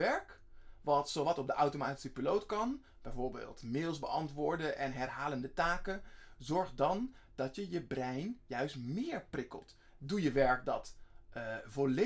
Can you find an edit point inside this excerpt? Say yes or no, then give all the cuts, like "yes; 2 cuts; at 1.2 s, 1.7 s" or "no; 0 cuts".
yes; 1 cut; at 10.0 s